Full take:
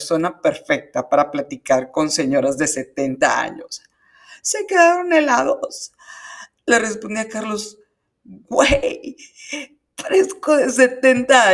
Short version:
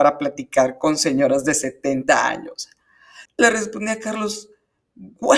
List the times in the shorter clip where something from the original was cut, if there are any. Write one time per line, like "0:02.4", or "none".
0:03.3